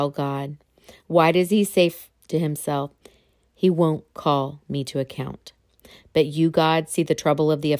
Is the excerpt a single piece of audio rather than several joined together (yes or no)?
yes